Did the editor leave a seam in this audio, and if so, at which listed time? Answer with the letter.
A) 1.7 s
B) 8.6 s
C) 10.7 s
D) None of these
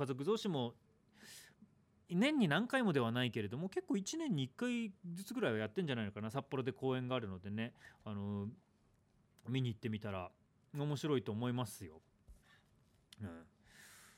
D